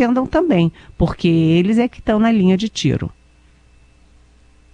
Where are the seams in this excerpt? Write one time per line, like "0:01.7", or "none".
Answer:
none

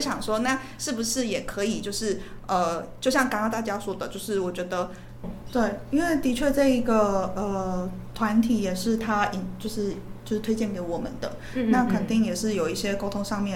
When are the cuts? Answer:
0:05.2

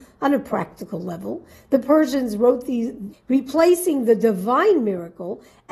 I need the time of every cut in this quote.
0:03.1

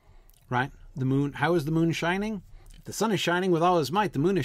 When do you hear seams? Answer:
none

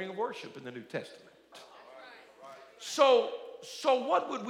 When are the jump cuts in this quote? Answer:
0:01.5

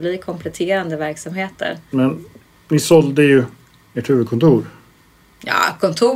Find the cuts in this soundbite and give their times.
0:01.9

